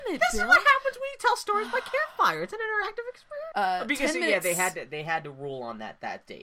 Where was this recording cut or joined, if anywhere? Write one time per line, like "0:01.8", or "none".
0:03.5